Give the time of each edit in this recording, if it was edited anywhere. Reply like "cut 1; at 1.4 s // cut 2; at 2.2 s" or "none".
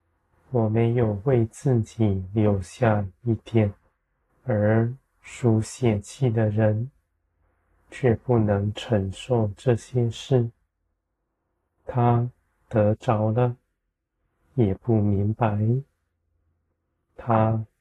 cut 1; at 4.3 s